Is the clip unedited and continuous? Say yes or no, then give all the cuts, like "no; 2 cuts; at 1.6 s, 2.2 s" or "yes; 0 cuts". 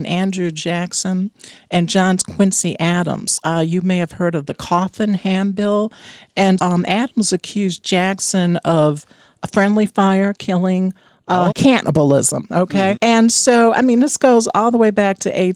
no; 3 cuts; at 6.6 s, 11.5 s, 13.0 s